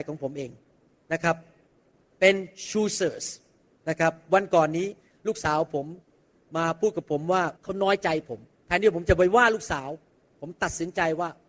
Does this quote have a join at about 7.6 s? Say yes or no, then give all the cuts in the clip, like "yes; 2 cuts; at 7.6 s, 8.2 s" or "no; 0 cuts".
yes; 1 cut; at 7.6 s